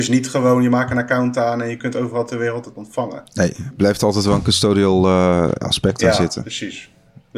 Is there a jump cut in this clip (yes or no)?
yes